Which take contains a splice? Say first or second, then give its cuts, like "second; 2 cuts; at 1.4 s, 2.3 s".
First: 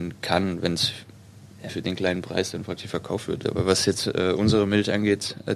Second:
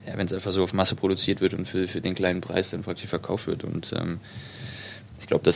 first; 2 cuts; at 1.7 s, 3.4 s